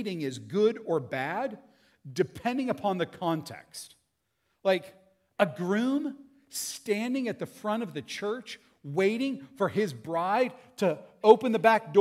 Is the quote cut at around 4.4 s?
no; 0 cuts

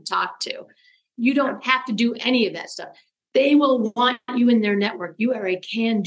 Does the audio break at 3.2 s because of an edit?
yes; 1 cut; at 3.2 s

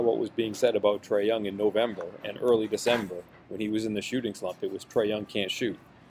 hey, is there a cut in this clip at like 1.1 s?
no; 0 cuts

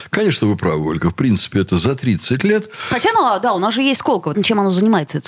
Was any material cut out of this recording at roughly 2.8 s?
no; 1 cut; at 4.3 s

